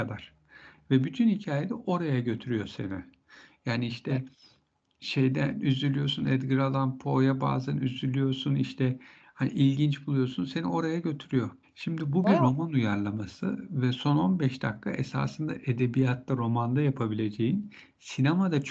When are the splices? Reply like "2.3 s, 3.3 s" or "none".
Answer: 11.6 s

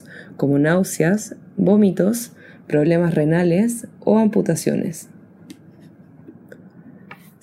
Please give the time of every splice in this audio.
none

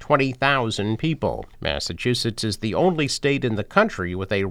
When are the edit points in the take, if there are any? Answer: 1.5 s

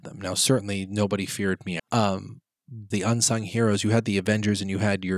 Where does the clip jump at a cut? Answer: 1.8 s, 2.9 s

